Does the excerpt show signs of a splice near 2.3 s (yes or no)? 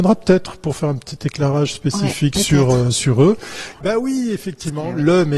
no